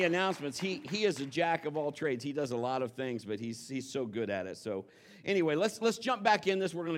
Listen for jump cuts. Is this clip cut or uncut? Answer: uncut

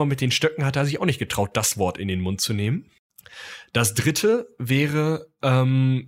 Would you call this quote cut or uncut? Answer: uncut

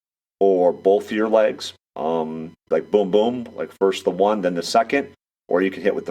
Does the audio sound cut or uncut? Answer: cut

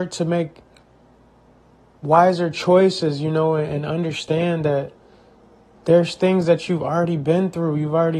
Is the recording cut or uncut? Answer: uncut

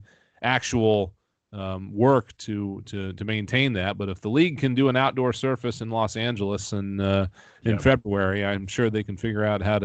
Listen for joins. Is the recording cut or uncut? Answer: uncut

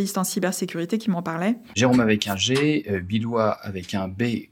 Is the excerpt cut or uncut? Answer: cut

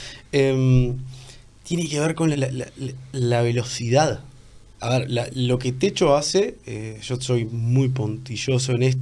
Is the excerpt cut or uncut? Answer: cut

